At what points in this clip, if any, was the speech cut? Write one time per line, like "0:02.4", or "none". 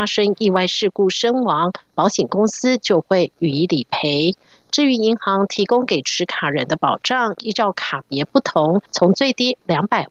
0:08.9